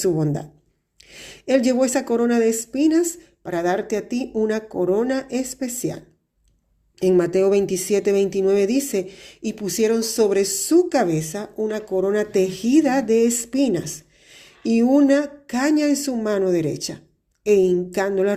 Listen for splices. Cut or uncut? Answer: uncut